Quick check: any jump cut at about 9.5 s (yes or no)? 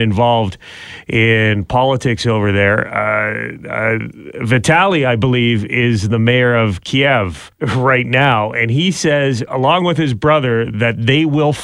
no